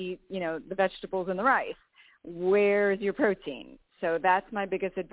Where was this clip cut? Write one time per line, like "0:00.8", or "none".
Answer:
none